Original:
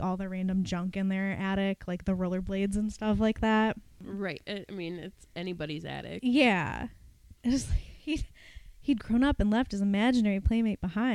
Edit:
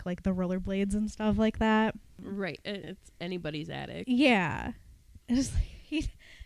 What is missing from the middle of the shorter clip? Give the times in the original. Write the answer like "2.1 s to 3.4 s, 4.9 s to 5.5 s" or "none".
4.6 s to 5.0 s